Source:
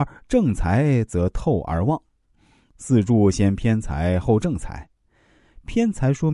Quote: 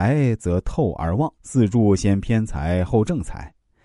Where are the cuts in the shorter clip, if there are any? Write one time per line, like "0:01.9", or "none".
0:01.4